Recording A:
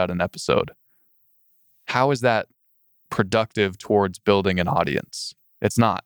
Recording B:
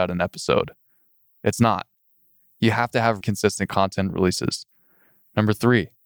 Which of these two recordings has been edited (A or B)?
B